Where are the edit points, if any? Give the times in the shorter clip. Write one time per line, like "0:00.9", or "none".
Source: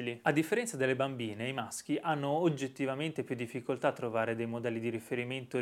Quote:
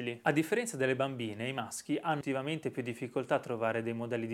0:02.2